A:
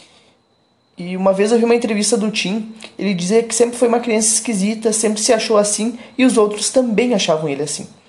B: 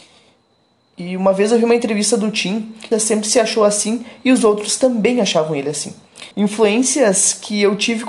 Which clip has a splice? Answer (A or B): B